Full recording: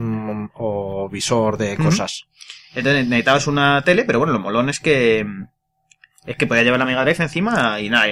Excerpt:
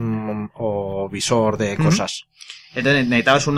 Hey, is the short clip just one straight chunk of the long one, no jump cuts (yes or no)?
yes